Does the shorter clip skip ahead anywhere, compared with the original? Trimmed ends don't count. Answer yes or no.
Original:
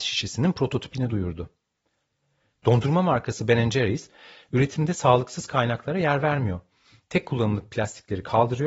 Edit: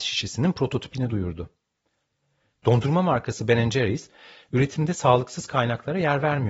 no